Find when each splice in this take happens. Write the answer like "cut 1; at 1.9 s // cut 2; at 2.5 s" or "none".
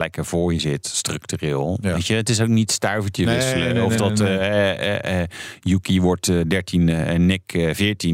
none